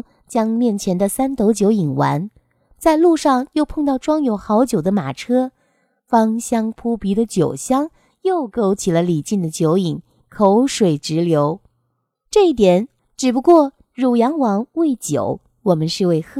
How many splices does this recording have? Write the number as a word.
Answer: one